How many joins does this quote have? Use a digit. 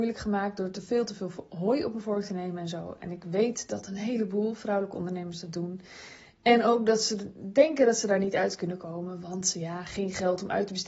0